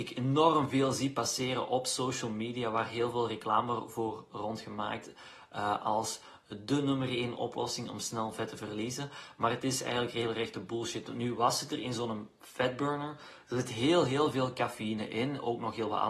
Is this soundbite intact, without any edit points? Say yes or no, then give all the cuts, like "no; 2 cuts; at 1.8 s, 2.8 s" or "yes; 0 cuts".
yes; 0 cuts